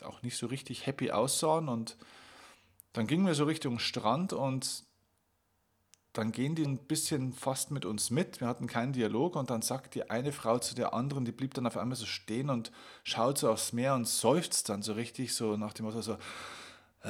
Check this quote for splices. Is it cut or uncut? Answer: cut